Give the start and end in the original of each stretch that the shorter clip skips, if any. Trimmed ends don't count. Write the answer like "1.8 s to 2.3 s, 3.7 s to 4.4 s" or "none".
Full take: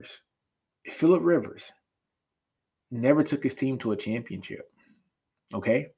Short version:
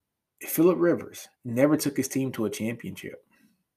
1.8 s to 2.8 s